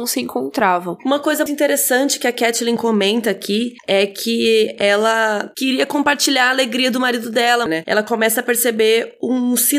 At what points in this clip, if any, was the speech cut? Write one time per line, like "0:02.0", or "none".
0:01.5
0:07.7